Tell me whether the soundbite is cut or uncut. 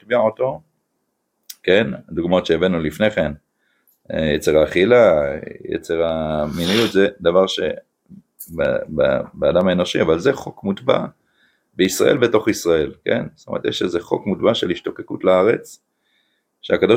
uncut